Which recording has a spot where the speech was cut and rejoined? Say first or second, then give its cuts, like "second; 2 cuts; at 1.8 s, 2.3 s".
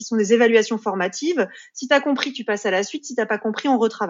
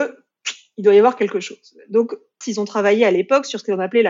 second; 1 cut; at 2.4 s